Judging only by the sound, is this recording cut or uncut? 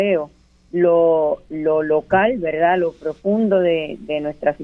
uncut